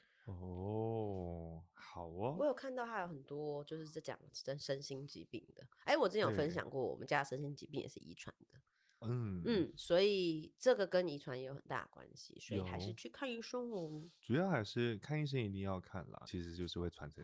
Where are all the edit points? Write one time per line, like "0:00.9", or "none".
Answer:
0:04.3
0:16.3